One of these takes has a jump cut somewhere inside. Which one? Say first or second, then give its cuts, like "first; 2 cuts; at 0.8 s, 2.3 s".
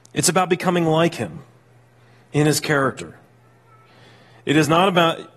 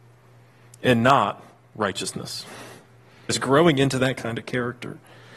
second; 1 cut; at 3.3 s